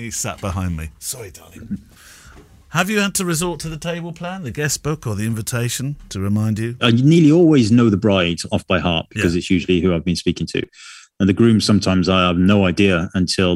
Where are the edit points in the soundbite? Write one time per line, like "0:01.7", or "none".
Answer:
0:06.8